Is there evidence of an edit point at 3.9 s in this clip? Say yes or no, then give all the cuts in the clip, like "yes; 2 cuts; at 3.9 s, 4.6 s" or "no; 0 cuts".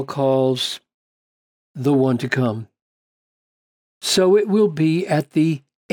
yes; 1 cut; at 3.9 s